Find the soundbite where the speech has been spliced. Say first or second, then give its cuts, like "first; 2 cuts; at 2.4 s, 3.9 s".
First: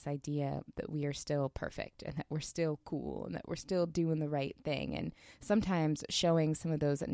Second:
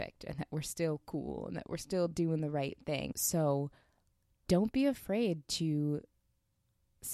second; 1 cut; at 3.1 s